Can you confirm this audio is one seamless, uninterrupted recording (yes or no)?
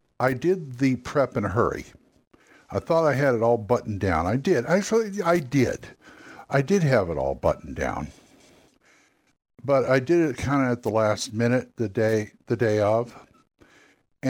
yes